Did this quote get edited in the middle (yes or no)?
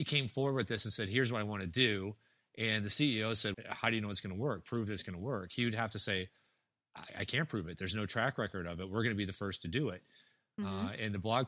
yes